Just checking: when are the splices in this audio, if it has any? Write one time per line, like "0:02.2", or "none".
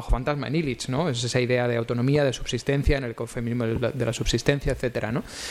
none